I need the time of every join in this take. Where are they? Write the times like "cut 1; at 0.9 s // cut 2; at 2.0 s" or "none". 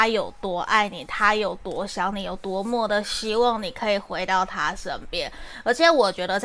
none